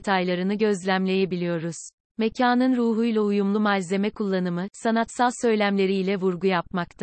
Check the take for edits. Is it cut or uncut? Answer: cut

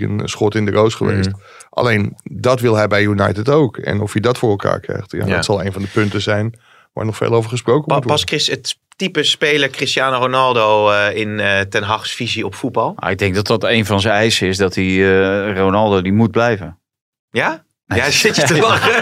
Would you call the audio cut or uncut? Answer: uncut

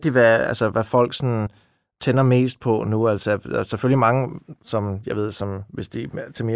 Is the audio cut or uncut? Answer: uncut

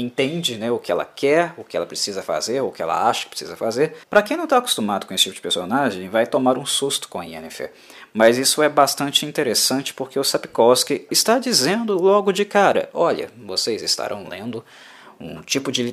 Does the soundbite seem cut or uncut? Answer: cut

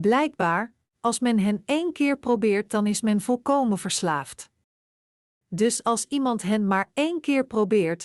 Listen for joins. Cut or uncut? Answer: uncut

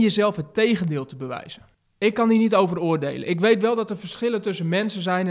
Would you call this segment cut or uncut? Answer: uncut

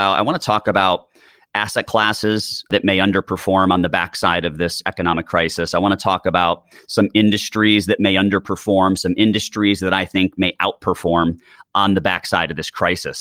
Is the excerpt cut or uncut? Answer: uncut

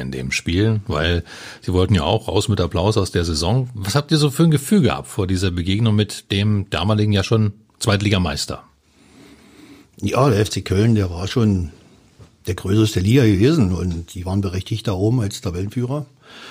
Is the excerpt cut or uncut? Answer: uncut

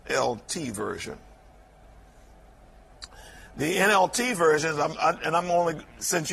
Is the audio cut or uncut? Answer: uncut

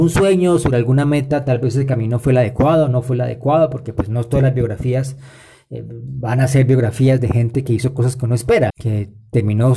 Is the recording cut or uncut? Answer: cut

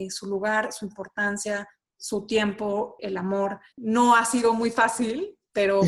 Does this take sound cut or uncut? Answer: cut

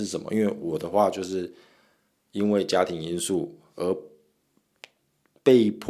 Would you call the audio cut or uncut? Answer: uncut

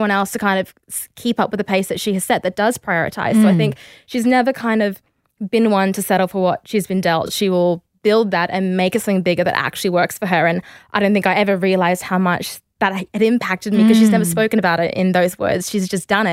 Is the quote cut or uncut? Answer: uncut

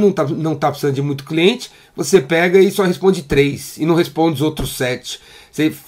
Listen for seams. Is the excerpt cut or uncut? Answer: uncut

